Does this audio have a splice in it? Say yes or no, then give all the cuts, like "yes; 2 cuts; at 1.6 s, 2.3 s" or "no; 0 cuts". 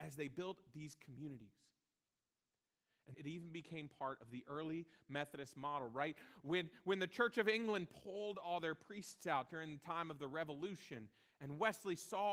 yes; 1 cut; at 3.1 s